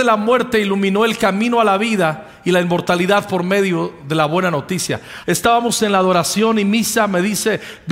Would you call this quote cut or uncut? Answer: cut